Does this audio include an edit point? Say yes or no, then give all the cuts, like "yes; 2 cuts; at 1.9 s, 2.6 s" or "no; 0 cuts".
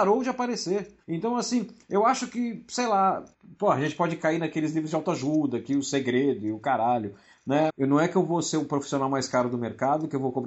yes; 2 cuts; at 1.0 s, 7.7 s